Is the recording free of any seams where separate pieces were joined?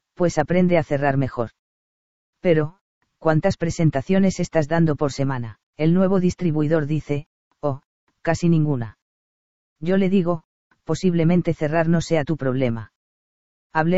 no; 2 cuts; at 3.1 s, 5.7 s

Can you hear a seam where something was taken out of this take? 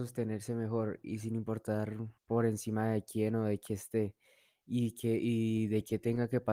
yes; 1 cut; at 2.2 s

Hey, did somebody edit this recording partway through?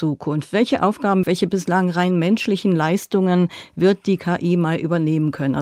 yes; 1 cut; at 1.2 s

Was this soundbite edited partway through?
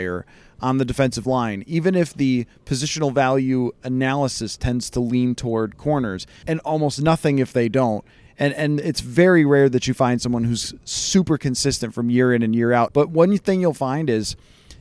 yes; 3 cuts; at 6.4 s, 8.3 s, 12.9 s

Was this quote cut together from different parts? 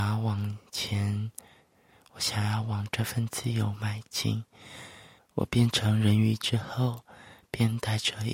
yes; 1 cut; at 5.2 s

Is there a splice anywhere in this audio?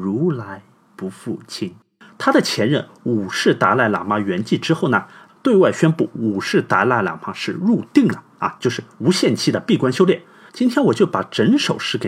yes; 3 cuts; at 2.1 s, 5.3 s, 10.5 s

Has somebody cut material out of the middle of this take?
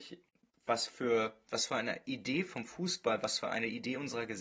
no; 0 cuts

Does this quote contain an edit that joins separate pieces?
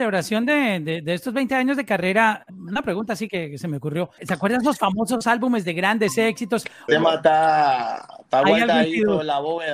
yes; 3 cuts; at 2.5 s, 4.2 s, 6.9 s

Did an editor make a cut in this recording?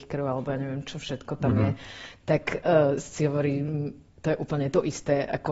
no; 0 cuts

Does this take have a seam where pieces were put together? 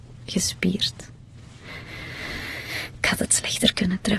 no; 0 cuts

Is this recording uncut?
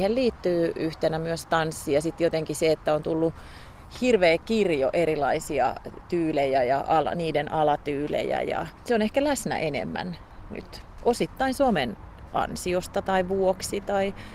yes; 0 cuts

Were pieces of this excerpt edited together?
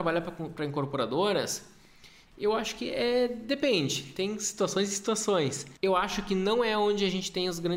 yes; 1 cut; at 5.8 s

